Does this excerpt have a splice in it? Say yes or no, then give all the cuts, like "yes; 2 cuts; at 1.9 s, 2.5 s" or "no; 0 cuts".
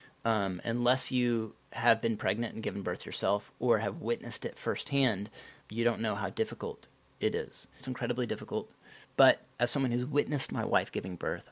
yes; 3 cuts; at 5.6 s, 7.8 s, 9.0 s